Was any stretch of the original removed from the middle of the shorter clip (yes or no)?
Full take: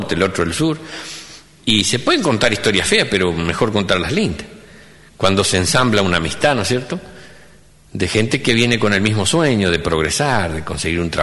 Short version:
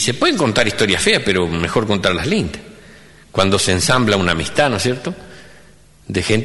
no